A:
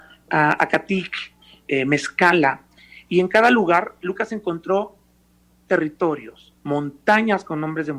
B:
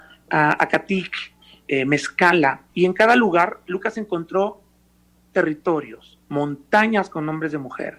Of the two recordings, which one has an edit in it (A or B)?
B